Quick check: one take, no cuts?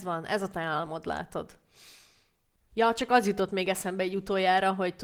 yes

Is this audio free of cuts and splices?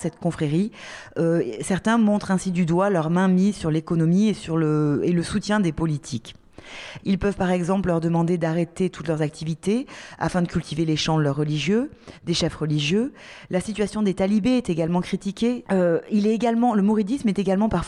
no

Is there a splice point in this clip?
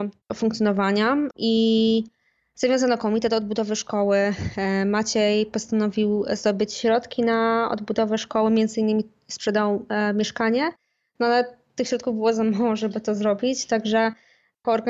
no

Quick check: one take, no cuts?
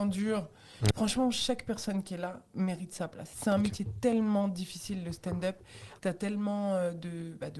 no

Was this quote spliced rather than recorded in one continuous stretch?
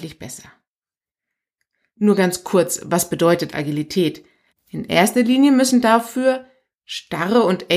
yes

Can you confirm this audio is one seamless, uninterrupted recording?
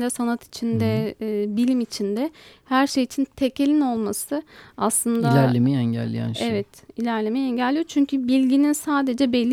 yes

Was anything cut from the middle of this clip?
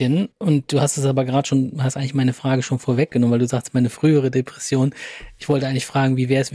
no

